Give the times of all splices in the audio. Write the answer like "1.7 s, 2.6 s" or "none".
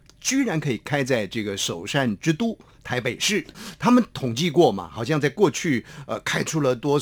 none